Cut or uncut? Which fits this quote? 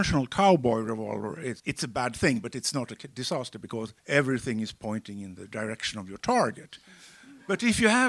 cut